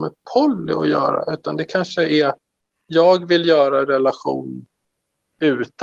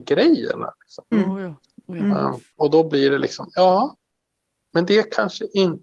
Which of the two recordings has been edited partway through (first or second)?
second